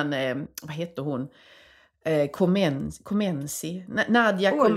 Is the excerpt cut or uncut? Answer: uncut